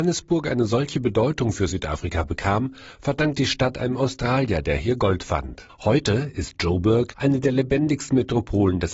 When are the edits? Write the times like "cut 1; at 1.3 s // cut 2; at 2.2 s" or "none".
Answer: cut 1; at 5.7 s // cut 2; at 7.1 s